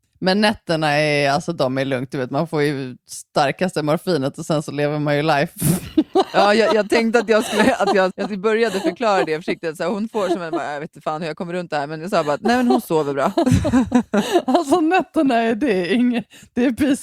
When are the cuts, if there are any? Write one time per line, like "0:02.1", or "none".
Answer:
0:08.1